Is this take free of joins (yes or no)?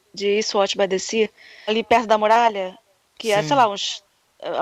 no